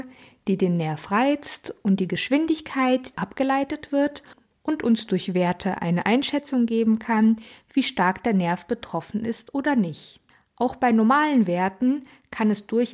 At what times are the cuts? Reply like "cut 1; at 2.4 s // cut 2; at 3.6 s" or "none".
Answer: cut 1; at 3.1 s